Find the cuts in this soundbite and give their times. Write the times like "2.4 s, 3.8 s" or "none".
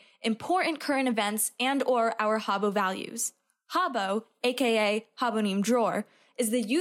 none